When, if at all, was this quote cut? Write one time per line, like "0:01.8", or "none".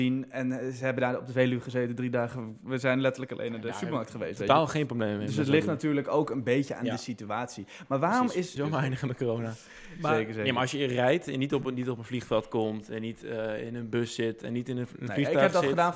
0:08.6